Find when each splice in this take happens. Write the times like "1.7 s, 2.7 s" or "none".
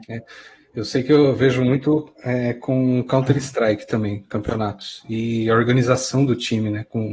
none